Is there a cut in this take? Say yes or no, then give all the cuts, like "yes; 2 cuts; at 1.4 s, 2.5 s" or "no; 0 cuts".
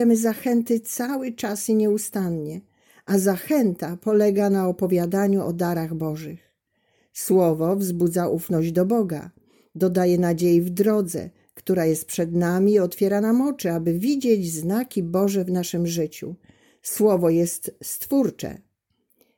no; 0 cuts